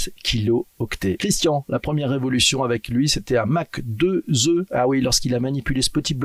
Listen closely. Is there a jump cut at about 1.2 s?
yes; 1 cut; at 1.2 s

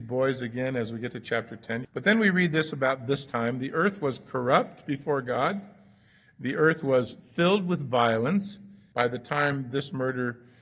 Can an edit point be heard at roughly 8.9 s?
yes; 2 cuts; at 1.8 s, 8.9 s

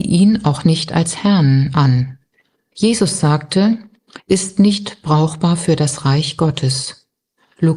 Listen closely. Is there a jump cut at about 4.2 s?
yes; 2 cuts; at 2.7 s, 4.2 s

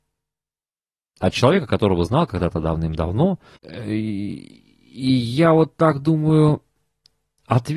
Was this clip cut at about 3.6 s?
yes; 1 cut; at 3.6 s

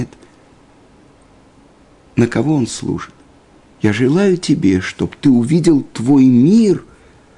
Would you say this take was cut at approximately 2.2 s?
no; 1 cut; at 3.7 s

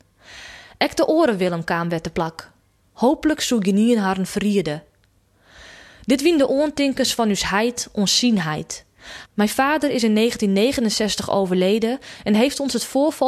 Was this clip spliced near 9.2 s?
yes; 2 cuts; at 2.8 s, 9.2 s

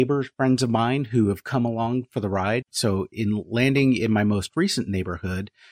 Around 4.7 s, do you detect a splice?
no; 1 cut; at 2.6 s

